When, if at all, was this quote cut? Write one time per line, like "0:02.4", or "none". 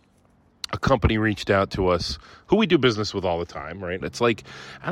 0:04.0